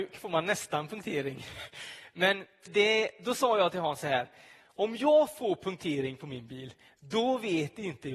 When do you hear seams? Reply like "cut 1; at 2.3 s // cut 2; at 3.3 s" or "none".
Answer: cut 1; at 2.7 s